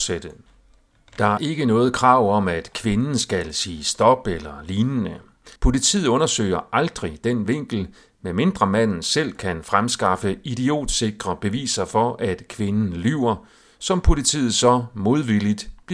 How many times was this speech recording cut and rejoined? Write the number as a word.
two